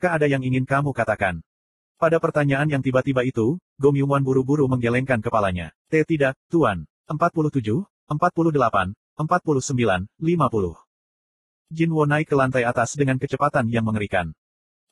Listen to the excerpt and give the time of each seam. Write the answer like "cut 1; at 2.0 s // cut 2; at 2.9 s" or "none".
cut 1; at 5.8 s // cut 2; at 7.0 s